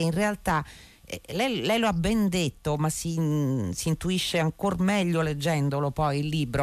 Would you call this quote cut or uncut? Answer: uncut